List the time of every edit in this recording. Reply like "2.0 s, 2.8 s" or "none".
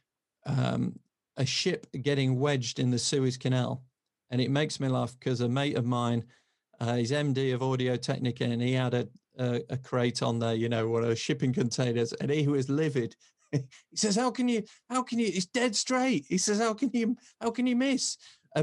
none